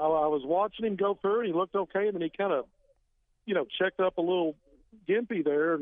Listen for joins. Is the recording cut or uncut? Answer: uncut